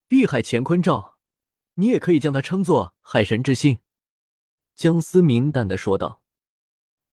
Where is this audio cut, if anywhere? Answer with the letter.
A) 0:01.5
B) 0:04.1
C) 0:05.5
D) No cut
C